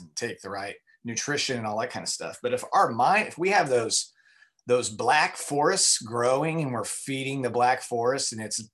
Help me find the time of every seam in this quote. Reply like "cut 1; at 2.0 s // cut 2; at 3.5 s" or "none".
none